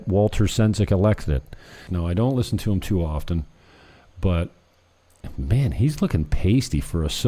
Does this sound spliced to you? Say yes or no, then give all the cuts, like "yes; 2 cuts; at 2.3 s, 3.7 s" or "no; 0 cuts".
yes; 1 cut; at 1.9 s